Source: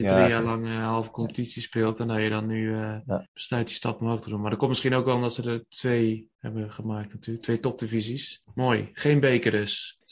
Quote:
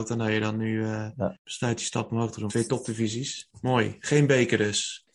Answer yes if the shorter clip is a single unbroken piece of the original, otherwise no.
no